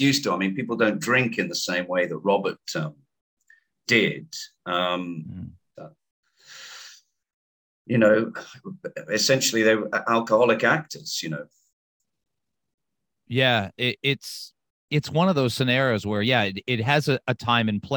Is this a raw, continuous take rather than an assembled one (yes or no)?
no